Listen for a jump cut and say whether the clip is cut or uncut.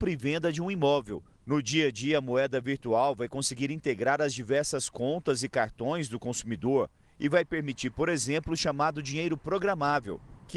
uncut